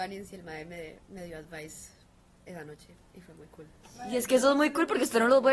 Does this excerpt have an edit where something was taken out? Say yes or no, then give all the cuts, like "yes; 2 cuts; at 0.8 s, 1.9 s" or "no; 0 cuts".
no; 0 cuts